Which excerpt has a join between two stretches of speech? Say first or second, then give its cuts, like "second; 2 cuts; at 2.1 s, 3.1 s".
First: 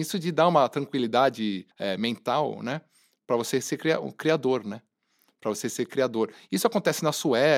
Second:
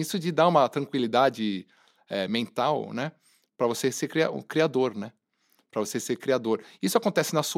first; 1 cut; at 1.7 s